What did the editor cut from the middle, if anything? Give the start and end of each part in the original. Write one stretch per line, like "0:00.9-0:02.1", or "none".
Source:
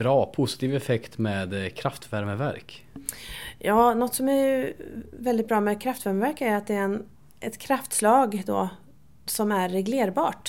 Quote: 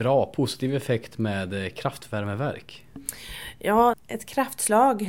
0:03.9-0:07.3